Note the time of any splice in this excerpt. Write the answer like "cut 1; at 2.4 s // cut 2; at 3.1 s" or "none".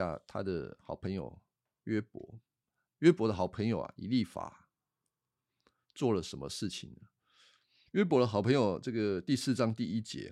none